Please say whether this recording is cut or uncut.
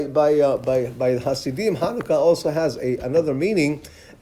uncut